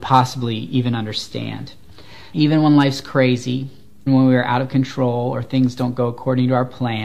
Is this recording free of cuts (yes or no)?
no